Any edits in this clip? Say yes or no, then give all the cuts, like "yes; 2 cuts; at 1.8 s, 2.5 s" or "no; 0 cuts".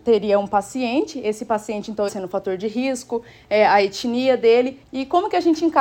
yes; 2 cuts; at 2.1 s, 4.8 s